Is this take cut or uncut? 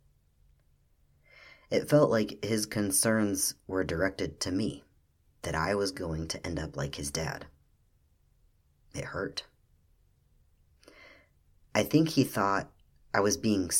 uncut